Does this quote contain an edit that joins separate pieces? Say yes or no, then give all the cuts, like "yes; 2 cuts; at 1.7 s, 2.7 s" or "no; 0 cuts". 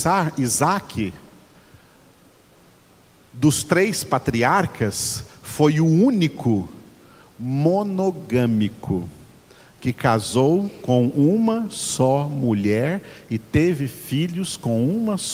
no; 0 cuts